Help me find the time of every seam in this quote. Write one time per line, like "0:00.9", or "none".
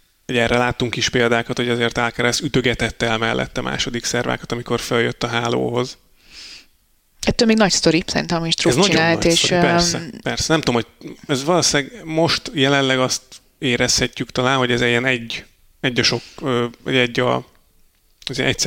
none